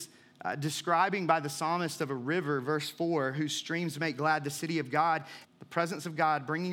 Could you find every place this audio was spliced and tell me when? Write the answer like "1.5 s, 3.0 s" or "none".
5.4 s

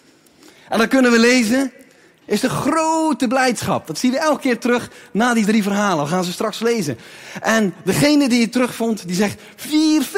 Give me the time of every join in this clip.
2.2 s

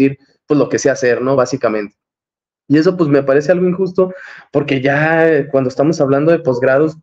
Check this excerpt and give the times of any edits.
none

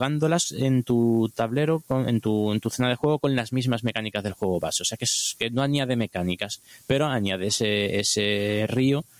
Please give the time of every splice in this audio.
none

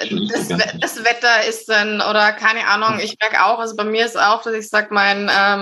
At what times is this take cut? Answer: none

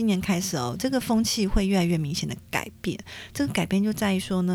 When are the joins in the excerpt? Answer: none

